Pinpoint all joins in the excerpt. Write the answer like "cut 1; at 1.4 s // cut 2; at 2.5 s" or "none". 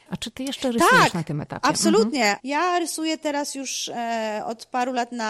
cut 1; at 2.4 s